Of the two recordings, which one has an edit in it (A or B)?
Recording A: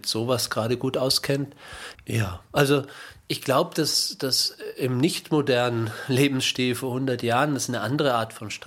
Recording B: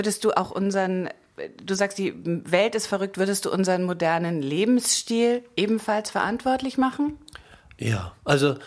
A